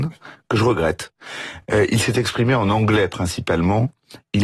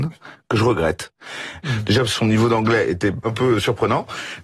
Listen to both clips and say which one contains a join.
second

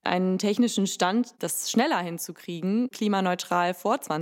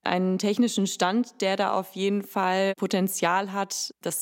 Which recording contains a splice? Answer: first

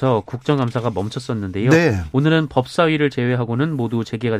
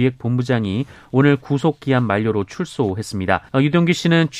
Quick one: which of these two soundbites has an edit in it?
second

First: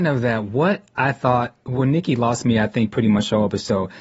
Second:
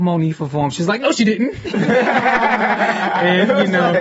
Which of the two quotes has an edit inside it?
first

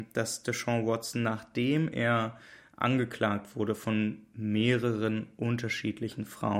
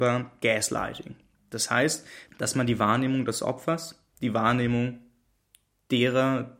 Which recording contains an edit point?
second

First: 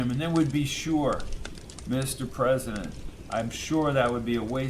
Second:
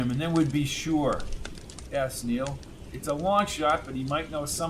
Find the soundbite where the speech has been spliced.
second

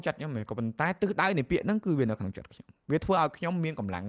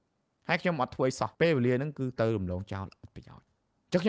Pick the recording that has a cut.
second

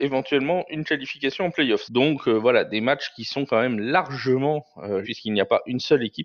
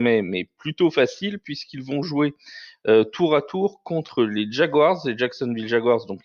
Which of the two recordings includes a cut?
first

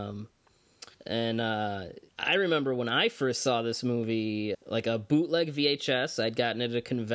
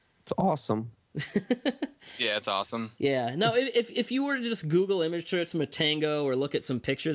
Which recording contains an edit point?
first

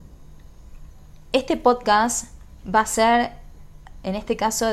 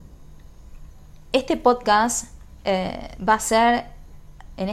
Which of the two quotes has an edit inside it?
first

